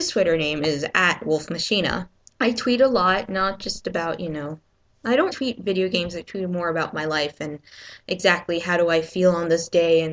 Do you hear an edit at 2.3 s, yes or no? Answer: yes